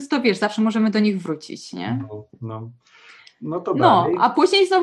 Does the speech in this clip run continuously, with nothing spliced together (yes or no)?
yes